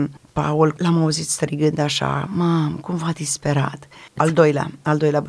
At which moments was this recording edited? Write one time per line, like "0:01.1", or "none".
0:02.3
0:04.2